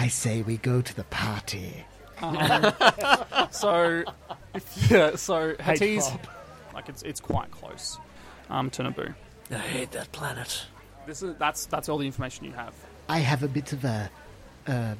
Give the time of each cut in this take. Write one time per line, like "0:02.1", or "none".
0:02.1
0:06.7